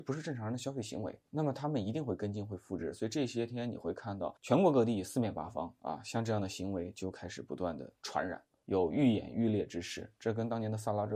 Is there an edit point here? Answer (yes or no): yes